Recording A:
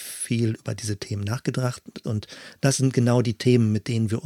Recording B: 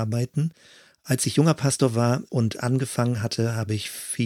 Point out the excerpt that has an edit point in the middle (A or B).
A